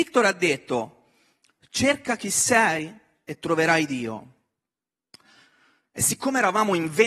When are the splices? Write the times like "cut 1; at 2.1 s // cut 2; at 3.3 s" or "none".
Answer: none